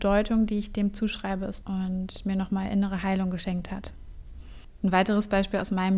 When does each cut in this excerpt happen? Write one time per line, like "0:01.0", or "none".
0:01.6